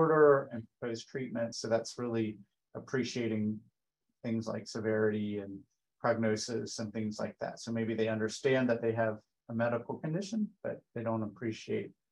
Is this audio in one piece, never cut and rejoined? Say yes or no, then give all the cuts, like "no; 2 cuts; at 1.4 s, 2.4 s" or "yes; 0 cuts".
yes; 0 cuts